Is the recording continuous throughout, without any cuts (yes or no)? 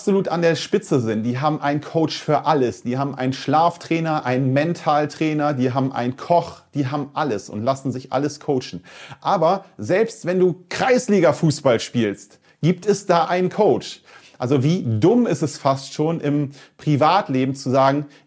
yes